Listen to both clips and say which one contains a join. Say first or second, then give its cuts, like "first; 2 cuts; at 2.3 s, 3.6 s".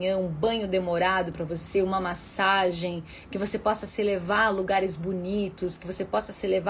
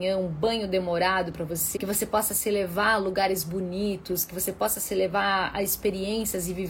second; 1 cut; at 1.8 s